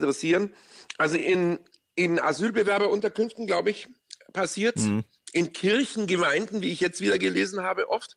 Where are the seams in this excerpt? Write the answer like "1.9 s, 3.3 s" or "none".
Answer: none